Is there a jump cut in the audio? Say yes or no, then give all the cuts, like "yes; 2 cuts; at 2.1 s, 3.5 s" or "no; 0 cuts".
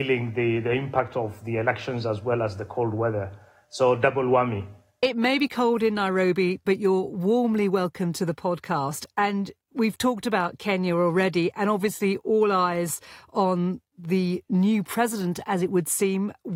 no; 0 cuts